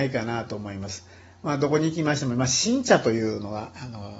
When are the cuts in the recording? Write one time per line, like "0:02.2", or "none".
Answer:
none